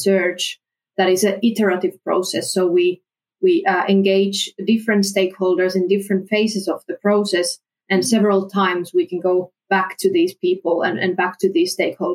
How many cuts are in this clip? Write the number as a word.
zero